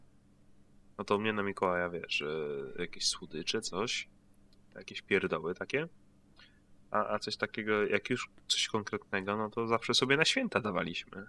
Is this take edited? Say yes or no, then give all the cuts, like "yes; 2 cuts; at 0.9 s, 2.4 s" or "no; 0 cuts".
no; 0 cuts